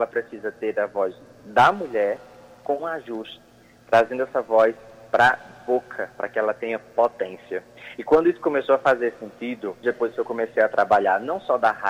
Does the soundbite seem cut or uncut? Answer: cut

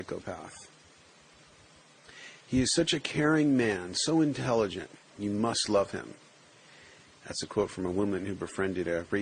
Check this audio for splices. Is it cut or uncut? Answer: cut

